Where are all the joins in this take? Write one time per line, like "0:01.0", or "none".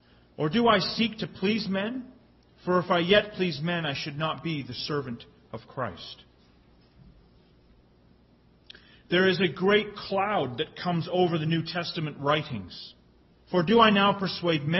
0:13.3